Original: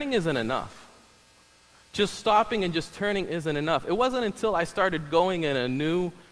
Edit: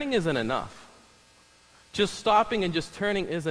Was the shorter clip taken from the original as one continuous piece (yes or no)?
yes